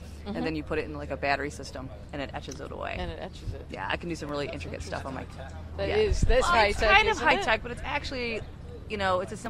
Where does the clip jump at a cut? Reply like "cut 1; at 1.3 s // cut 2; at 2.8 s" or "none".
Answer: cut 1; at 6.5 s